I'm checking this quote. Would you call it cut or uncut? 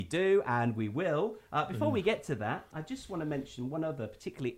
uncut